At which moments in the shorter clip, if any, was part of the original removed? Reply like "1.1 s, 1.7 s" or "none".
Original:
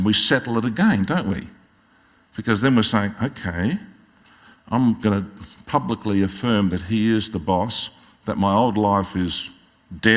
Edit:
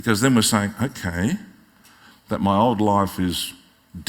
2.1 s